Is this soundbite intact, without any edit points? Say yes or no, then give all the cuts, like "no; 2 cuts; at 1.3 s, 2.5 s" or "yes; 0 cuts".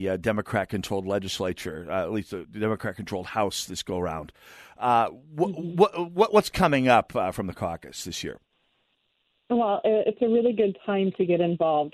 yes; 0 cuts